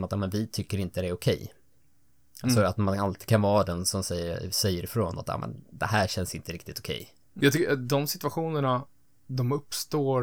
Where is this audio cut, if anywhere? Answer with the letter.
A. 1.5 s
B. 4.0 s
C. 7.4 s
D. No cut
C